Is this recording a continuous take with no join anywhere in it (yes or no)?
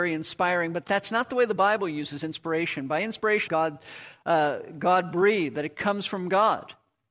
no